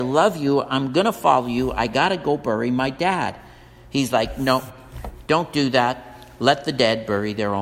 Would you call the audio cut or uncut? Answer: uncut